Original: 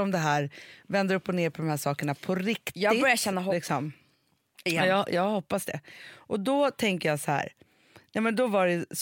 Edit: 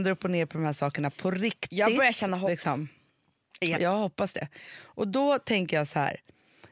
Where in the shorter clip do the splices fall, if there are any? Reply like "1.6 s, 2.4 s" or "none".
3.7 s

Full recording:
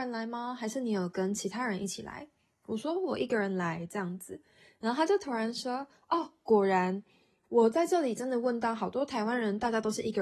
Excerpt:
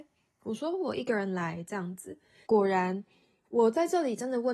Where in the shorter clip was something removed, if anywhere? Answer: 2.4 s

